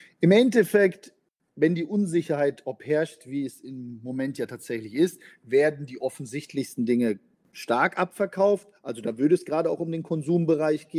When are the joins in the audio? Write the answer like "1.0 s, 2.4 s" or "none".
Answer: none